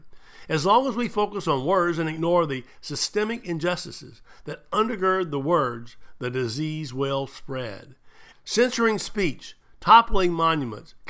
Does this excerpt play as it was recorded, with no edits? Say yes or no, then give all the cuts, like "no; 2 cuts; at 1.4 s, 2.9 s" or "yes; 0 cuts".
no; 1 cut; at 8.3 s